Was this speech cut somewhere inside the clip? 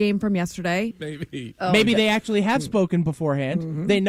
yes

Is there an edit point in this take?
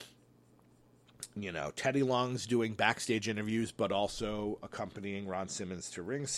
no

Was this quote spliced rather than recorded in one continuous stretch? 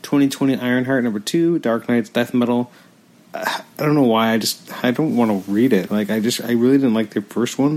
yes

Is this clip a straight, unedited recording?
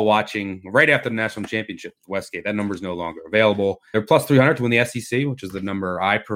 yes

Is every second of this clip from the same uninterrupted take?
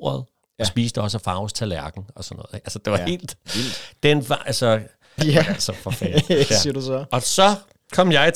no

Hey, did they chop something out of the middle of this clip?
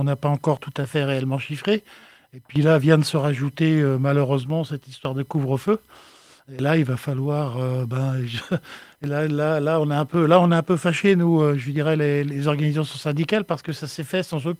no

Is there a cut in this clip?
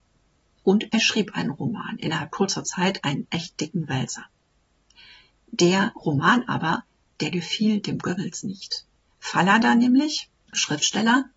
no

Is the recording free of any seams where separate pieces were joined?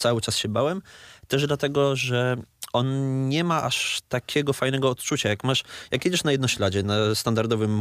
yes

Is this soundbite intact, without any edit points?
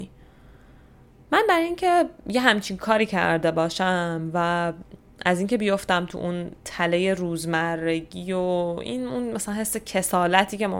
yes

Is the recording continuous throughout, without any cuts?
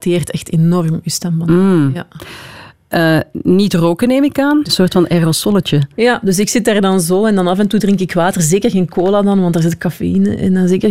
no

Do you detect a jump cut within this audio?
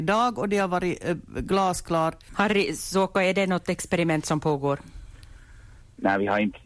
yes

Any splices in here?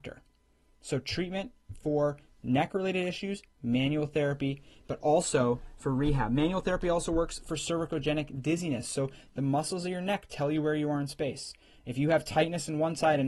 no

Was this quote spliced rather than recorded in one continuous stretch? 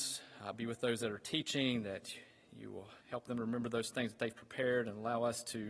yes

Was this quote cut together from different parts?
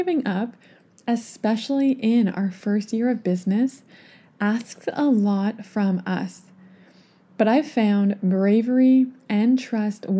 yes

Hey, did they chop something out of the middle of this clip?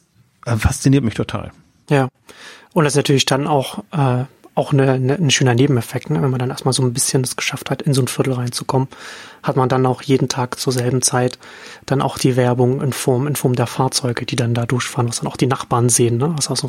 no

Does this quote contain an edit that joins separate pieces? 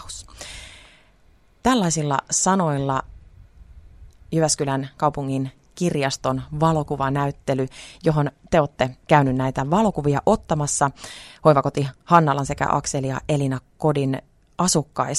yes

